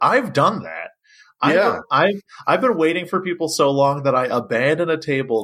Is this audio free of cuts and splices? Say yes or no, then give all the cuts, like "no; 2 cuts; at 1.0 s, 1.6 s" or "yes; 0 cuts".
yes; 0 cuts